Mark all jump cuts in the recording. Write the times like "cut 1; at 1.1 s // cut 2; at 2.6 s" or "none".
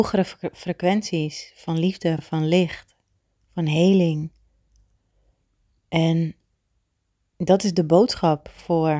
none